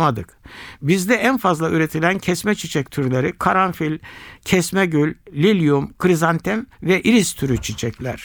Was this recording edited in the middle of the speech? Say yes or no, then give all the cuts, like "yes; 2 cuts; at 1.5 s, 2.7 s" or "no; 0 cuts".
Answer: yes; 1 cut; at 5.3 s